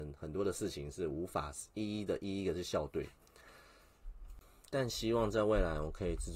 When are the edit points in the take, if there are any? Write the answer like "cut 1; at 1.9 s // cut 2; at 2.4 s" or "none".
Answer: none